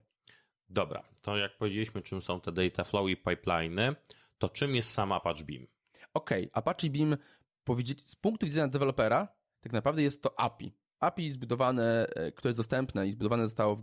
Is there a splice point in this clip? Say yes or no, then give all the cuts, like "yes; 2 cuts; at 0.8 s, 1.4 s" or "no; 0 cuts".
no; 0 cuts